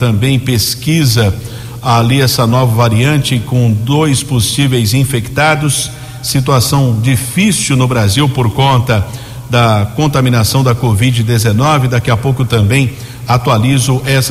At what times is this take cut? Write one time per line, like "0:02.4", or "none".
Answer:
none